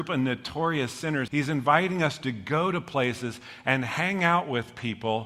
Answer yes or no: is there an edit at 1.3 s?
yes